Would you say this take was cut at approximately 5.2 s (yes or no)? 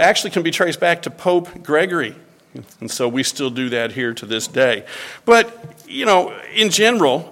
no